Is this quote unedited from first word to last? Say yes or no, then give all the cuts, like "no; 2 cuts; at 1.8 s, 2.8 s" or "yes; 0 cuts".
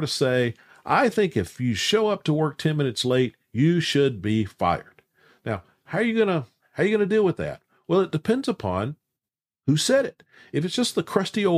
yes; 0 cuts